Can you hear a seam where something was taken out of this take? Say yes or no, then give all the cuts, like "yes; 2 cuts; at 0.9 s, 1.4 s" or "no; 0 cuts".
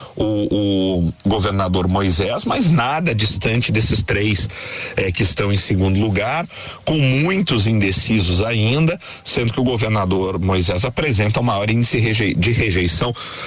no; 0 cuts